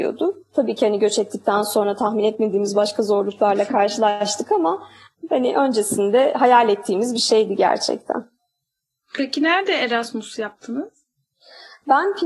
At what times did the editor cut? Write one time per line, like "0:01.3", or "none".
none